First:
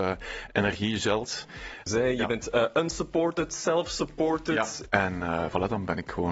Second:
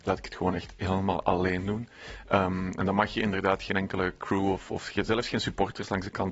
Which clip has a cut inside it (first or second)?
first